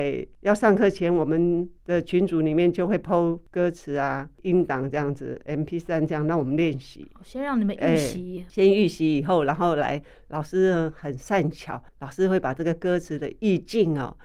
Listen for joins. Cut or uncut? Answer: cut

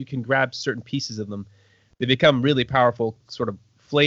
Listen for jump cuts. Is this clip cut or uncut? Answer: uncut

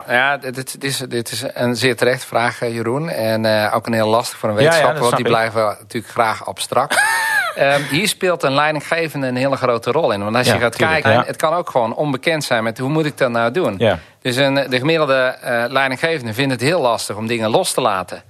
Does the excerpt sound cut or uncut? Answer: cut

